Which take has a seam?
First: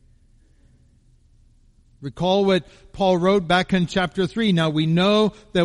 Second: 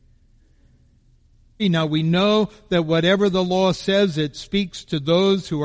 second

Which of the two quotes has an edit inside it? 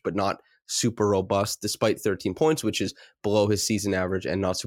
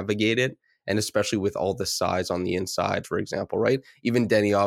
second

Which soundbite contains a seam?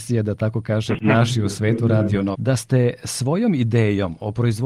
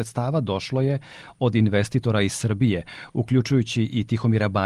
first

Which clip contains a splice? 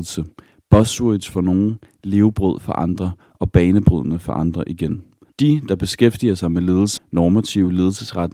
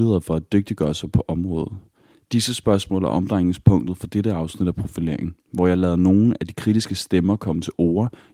first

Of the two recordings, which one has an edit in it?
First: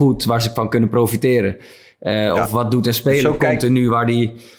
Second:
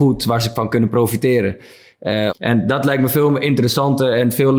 second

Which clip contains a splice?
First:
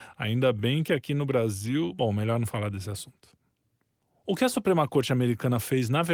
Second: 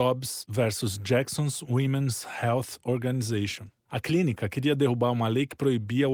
second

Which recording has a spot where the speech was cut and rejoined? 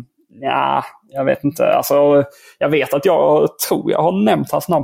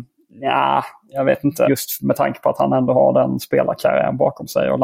second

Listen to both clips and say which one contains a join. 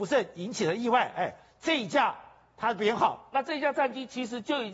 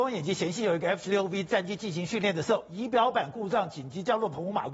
first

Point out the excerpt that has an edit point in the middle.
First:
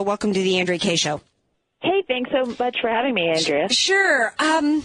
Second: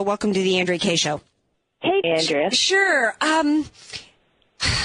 second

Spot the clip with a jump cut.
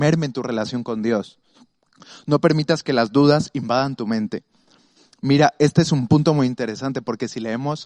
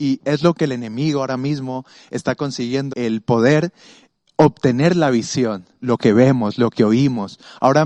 second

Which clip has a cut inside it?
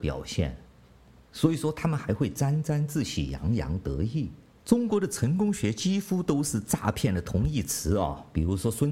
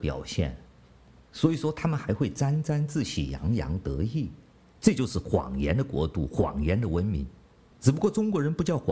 second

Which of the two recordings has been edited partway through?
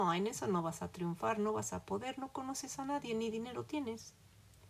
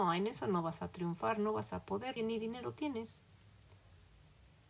second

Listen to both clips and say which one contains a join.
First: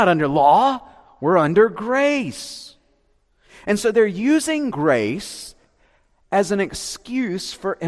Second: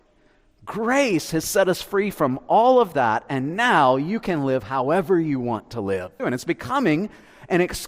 second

